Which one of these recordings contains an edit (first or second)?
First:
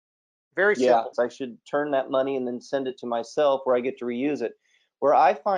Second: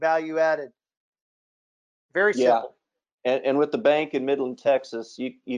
first